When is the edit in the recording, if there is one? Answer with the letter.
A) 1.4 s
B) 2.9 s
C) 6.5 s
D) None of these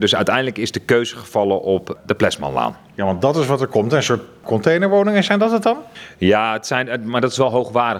D